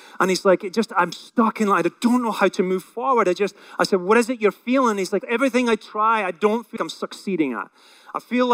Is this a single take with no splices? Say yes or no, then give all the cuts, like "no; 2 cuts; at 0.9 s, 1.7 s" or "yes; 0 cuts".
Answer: no; 2 cuts; at 5.2 s, 6.8 s